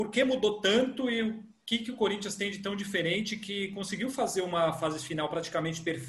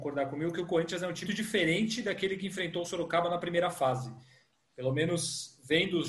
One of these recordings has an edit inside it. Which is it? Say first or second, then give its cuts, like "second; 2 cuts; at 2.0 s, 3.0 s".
second; 1 cut; at 1.3 s